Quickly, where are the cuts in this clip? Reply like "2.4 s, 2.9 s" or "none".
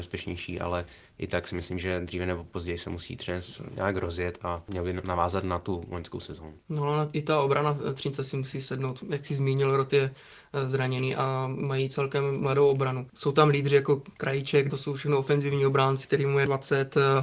6.6 s, 14.7 s, 16.0 s